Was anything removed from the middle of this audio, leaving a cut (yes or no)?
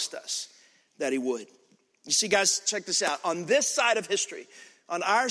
no